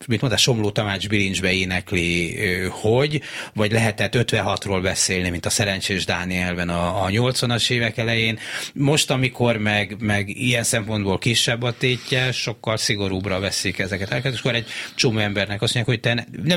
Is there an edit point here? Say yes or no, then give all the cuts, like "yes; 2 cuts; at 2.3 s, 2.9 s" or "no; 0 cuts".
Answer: no; 0 cuts